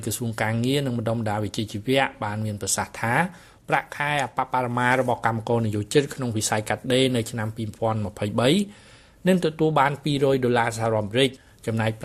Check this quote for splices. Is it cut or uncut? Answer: uncut